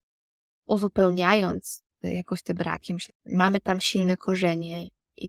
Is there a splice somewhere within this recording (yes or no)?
yes